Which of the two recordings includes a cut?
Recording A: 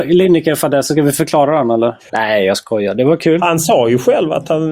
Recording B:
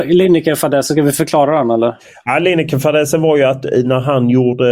A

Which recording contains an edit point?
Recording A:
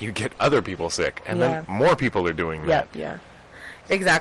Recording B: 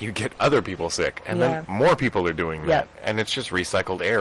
A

